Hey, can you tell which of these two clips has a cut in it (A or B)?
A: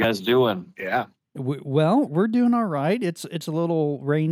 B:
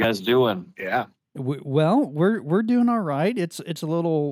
A